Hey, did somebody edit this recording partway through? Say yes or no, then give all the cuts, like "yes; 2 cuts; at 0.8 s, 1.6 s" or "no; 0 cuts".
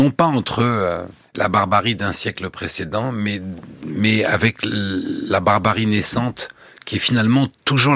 no; 0 cuts